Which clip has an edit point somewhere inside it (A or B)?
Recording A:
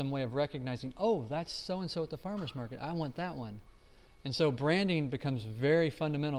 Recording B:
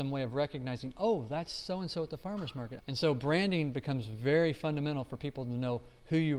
B